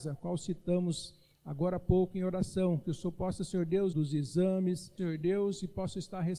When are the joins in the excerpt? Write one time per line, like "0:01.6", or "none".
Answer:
0:03.9
0:05.0